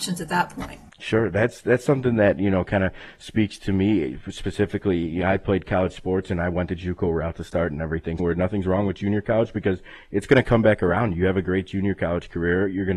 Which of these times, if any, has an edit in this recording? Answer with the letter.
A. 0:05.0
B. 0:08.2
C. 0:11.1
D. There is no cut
B